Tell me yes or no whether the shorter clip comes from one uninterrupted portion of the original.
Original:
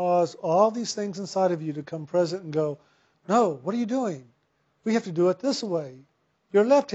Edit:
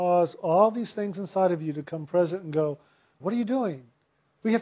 no